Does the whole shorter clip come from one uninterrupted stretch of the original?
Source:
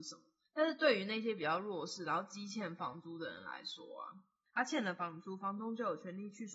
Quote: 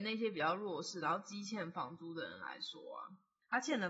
yes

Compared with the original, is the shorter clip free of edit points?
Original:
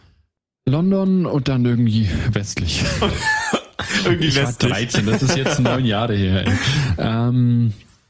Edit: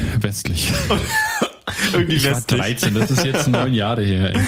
yes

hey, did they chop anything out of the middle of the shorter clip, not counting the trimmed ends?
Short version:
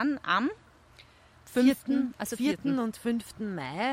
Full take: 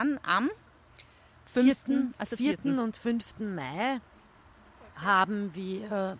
no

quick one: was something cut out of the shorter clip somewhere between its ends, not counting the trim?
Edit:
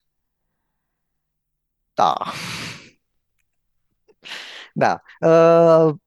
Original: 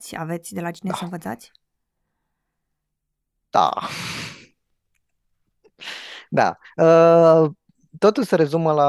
no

